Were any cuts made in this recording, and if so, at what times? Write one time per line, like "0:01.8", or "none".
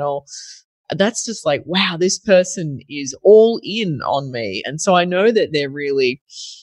none